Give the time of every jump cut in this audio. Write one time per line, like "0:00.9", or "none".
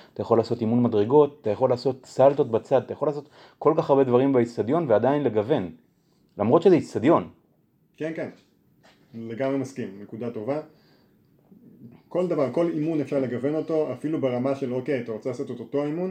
none